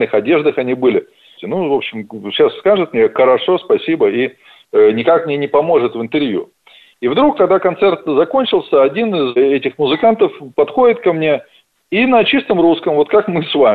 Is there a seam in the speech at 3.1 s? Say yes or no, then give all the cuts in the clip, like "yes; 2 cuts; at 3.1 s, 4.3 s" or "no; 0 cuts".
no; 1 cut; at 1.4 s